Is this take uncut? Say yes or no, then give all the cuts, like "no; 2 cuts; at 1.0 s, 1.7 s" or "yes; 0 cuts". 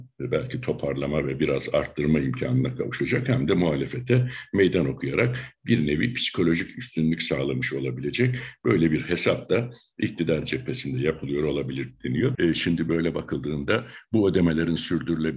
no; 1 cut; at 12.3 s